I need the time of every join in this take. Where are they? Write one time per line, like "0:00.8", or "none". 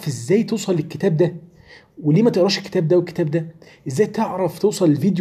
none